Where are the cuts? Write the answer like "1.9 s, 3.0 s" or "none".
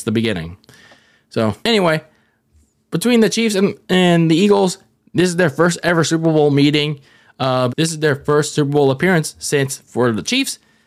1.6 s, 7.7 s